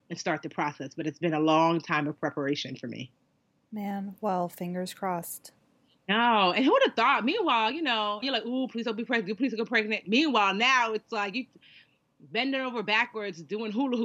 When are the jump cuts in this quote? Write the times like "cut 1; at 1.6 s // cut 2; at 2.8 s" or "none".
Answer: cut 1; at 8.2 s // cut 2; at 9.4 s